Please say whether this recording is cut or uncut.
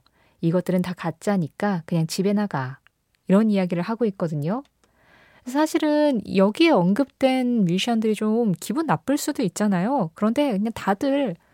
uncut